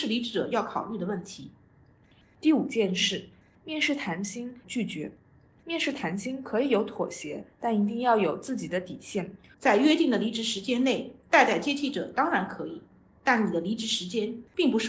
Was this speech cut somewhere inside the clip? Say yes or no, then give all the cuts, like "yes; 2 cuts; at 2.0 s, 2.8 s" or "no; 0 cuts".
yes; 2 cuts; at 4.6 s, 9.5 s